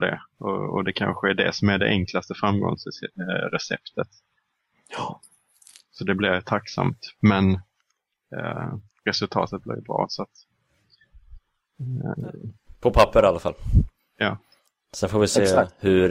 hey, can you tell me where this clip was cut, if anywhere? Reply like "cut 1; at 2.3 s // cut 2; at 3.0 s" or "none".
none